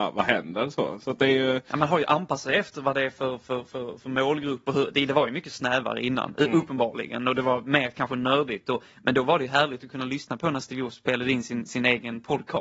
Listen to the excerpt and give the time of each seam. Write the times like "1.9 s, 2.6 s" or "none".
none